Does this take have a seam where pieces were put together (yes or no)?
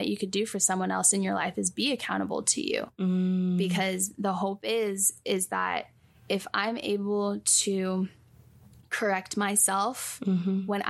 no